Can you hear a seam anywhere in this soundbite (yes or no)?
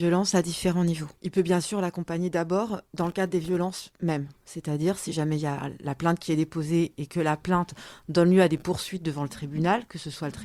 yes